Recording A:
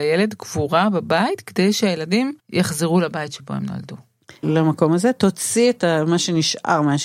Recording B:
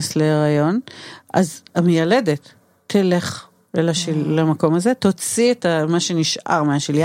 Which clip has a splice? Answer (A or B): A